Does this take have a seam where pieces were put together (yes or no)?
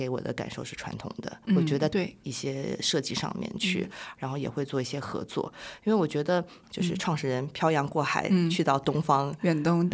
yes